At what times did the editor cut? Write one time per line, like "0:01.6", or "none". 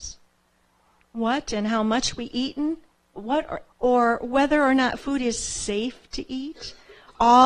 0:03.7